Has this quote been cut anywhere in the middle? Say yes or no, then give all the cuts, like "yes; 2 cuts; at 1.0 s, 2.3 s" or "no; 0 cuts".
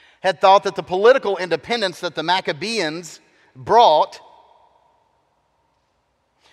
no; 0 cuts